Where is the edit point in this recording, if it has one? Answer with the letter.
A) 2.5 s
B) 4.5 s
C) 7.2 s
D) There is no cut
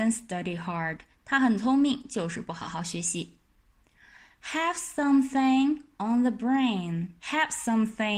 C